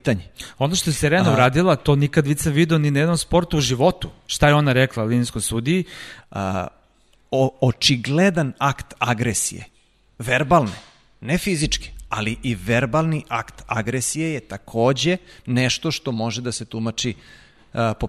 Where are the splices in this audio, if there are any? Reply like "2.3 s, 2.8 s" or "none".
6.2 s